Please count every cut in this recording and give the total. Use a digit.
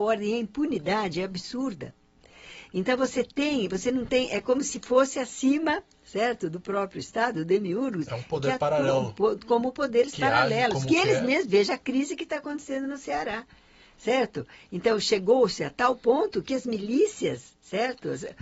0